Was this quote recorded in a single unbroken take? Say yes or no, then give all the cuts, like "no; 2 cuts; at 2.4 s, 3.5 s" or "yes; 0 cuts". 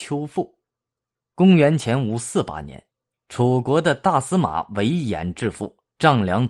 yes; 0 cuts